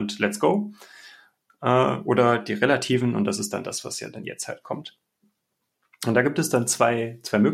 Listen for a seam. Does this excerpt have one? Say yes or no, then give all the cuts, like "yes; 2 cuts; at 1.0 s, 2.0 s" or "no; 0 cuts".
no; 0 cuts